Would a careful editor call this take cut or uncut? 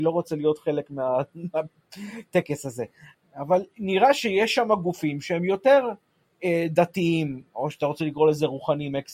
uncut